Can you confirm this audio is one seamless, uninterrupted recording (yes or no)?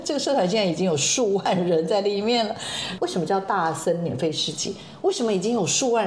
yes